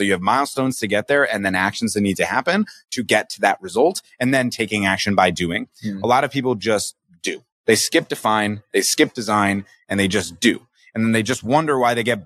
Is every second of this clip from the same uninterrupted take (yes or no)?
yes